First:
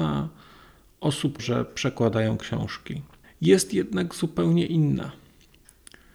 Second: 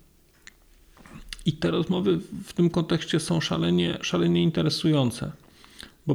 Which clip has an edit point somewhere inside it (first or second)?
first